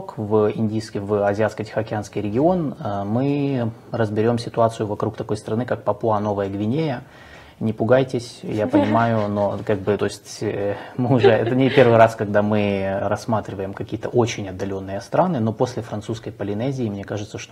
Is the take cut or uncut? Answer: cut